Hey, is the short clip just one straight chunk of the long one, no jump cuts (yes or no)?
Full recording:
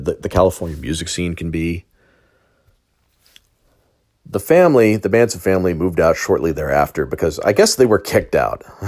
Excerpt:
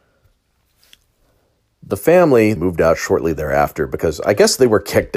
no